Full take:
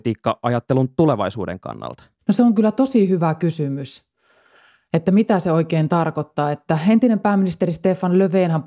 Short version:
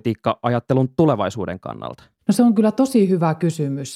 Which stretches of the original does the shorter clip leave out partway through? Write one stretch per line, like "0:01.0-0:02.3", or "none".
none

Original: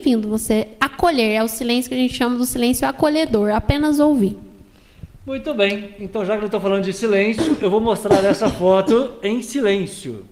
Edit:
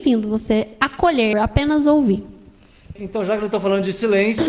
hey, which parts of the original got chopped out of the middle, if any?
0:01.3-0:03.5
0:05.1-0:06.0

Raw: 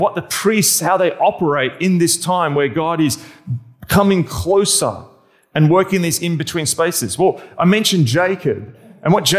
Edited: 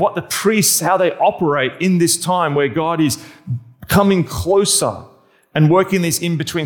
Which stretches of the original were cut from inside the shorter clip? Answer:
none

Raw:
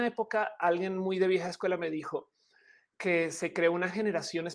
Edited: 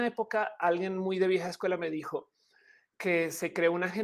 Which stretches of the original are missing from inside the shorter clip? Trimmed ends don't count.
none

